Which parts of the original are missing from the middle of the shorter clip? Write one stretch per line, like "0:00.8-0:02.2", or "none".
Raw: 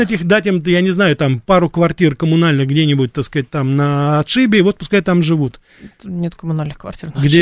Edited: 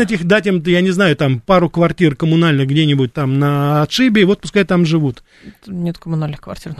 0:03.1-0:03.5